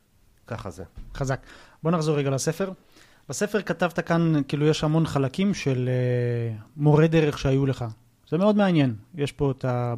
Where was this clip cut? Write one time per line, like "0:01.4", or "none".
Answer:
none